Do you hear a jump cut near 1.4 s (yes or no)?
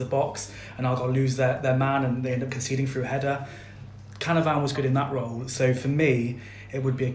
no